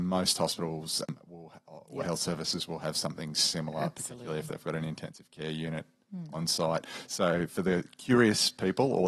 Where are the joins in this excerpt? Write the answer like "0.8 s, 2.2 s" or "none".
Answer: none